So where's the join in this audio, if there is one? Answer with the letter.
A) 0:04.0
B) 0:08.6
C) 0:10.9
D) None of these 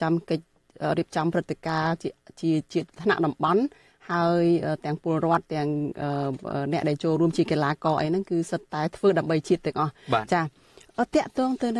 D